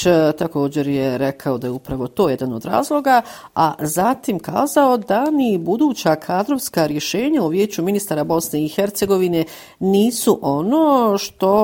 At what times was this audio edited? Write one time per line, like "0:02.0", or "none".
none